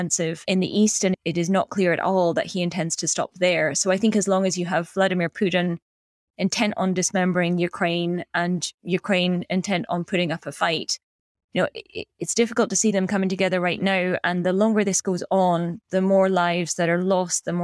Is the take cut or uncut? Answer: uncut